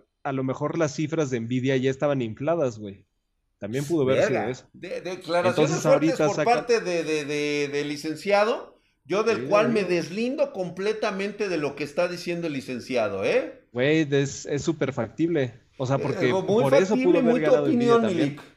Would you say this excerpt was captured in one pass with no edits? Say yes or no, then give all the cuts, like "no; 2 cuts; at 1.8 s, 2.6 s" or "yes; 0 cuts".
yes; 0 cuts